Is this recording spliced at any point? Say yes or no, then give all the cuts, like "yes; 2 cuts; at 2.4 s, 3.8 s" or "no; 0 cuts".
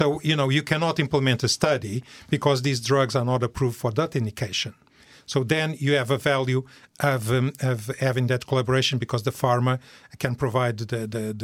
no; 0 cuts